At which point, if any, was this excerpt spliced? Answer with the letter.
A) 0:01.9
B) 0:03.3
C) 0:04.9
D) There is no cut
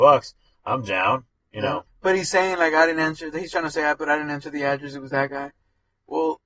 A